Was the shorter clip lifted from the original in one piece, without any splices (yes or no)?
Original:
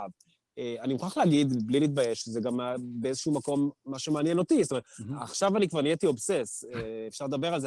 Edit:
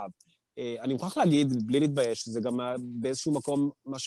yes